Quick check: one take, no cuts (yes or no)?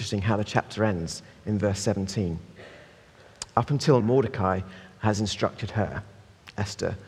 no